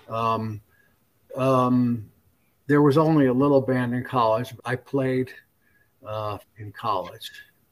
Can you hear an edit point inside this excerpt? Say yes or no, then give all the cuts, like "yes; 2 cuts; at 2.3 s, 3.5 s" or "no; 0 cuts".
yes; 3 cuts; at 1.3 s, 4.6 s, 6.4 s